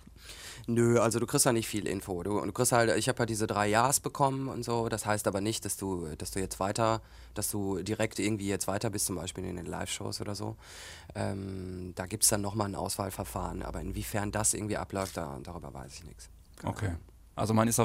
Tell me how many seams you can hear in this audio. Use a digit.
0